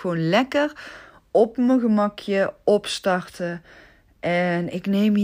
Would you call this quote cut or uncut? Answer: uncut